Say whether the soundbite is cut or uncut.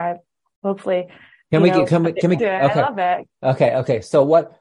cut